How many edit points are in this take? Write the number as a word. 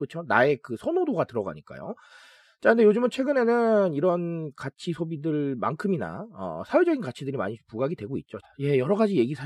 one